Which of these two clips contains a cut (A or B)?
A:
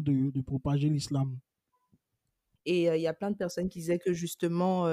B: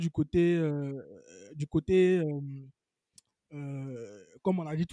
A